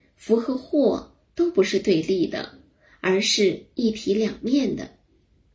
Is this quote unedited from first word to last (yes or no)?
yes